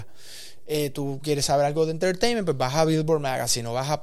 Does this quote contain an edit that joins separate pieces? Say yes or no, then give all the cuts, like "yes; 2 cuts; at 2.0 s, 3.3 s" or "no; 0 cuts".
no; 0 cuts